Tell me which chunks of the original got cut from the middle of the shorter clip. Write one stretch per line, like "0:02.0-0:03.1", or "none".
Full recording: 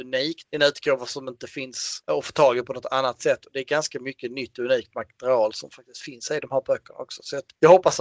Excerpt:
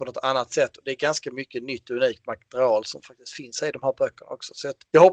none